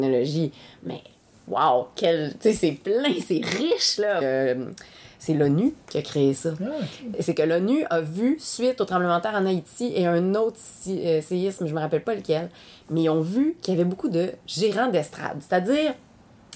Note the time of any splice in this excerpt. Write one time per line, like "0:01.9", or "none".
0:04.2